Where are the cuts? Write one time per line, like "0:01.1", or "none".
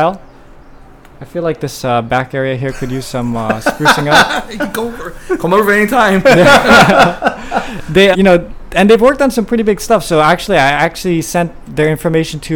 0:08.1